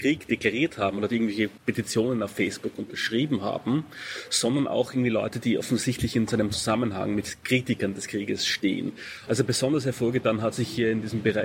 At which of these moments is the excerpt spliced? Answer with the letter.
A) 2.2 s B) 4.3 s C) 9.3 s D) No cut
C